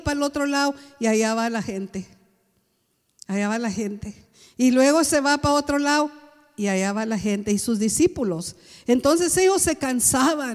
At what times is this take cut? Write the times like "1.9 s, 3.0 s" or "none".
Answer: none